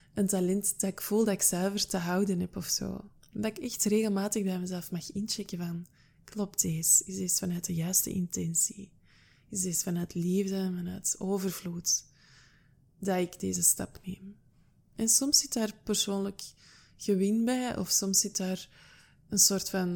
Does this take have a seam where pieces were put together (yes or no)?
no